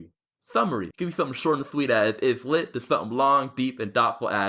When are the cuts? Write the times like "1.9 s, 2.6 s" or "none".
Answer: 0.9 s